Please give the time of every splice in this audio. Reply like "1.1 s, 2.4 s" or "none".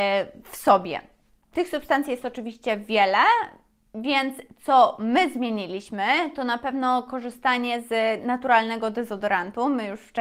1.5 s